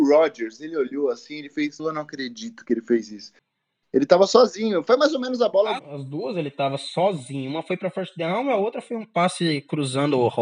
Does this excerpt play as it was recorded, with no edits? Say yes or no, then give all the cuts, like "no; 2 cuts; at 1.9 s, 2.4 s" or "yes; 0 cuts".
no; 2 cuts; at 1.8 s, 5.8 s